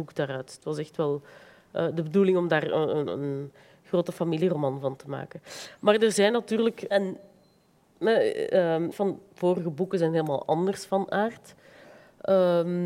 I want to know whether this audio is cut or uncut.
cut